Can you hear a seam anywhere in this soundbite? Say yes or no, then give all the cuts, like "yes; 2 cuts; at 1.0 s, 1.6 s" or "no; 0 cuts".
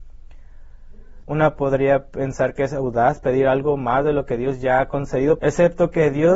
yes; 2 cuts; at 1.2 s, 5.4 s